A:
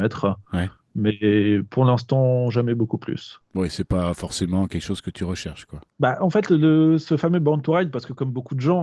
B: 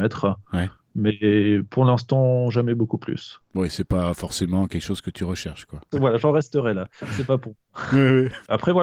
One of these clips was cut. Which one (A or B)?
B